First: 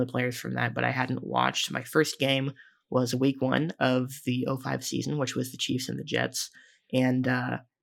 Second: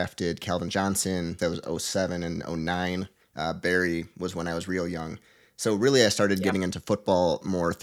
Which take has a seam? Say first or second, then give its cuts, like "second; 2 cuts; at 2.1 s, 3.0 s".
second; 2 cuts; at 1.4 s, 3.2 s